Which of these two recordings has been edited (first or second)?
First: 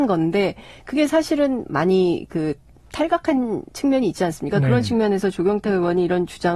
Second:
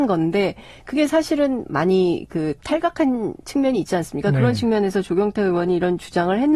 second